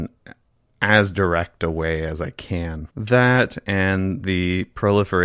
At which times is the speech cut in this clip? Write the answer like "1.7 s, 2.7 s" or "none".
2.9 s